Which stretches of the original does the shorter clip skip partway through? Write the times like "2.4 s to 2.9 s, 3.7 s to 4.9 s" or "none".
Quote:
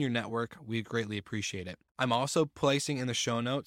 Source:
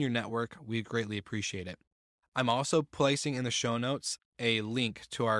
1.9 s to 2.3 s